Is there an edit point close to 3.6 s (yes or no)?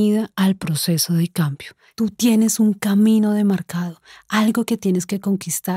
no